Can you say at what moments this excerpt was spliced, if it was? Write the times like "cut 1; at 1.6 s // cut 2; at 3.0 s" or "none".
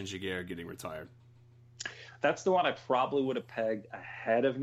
none